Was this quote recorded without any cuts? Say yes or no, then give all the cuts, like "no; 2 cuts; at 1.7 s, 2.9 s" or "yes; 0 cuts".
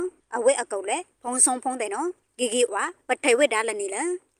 no; 1 cut; at 2.7 s